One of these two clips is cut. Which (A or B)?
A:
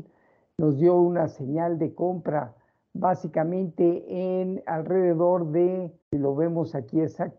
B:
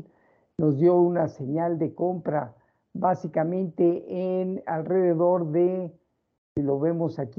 A